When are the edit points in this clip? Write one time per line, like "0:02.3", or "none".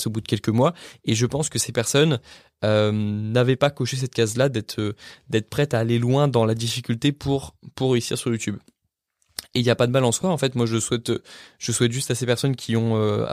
none